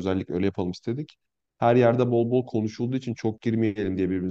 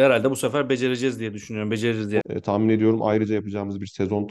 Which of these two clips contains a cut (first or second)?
second